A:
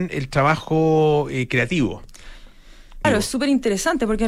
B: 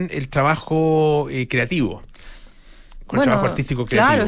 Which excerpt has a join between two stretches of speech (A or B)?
A